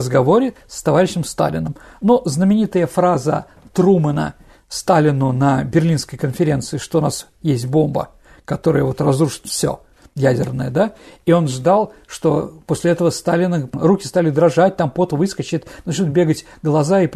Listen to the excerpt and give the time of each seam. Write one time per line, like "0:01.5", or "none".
none

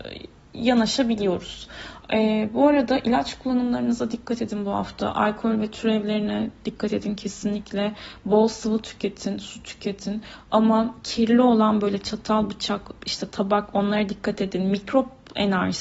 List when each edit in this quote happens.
0:02.0

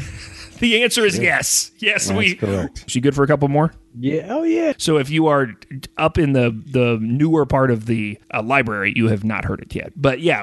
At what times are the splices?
0:02.9
0:04.7
0:08.2

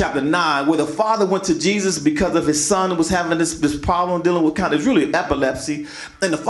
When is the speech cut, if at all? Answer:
none

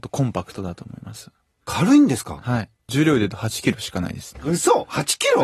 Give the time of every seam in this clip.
0:04.4

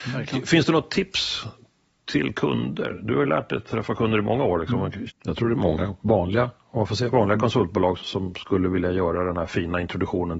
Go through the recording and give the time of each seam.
0:05.1
0:08.0

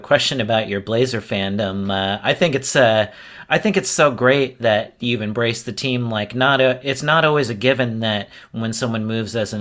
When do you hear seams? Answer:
none

